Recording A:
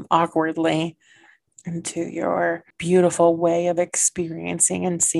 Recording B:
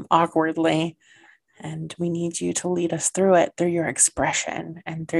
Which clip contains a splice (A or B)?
A